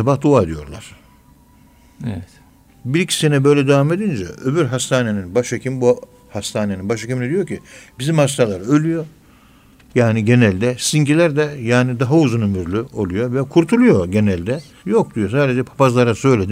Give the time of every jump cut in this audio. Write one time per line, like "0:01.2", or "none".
0:02.7
0:14.8